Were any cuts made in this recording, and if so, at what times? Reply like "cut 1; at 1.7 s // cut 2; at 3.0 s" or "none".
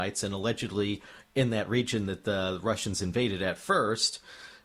none